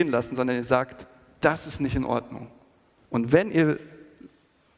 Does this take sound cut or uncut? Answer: cut